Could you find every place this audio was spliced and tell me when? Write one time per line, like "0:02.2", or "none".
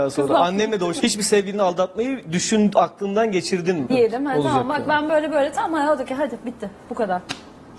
0:01.0
0:03.9